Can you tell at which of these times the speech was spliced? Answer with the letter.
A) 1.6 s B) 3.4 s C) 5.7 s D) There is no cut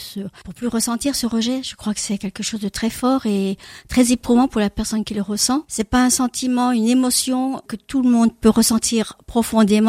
D